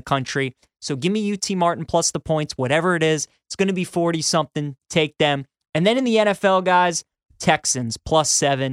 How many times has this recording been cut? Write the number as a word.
zero